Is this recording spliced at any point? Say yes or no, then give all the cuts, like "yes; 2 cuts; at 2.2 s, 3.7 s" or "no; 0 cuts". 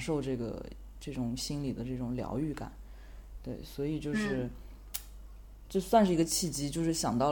no; 0 cuts